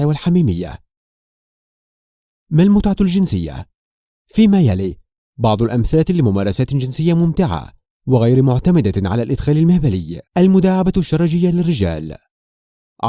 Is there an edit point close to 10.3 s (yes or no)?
yes